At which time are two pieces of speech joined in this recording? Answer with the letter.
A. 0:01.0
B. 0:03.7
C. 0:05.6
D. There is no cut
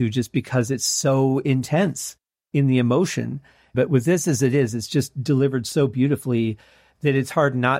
B